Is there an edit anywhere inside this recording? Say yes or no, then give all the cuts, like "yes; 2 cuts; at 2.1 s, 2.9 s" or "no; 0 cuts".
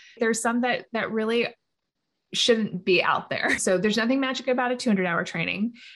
yes; 1 cut; at 3.6 s